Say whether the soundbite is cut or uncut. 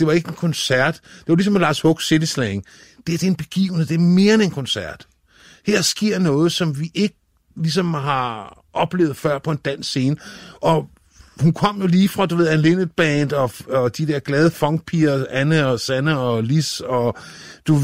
uncut